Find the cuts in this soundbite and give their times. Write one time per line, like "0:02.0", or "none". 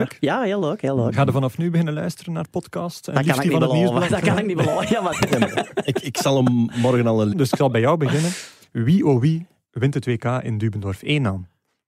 0:05.1
0:07.3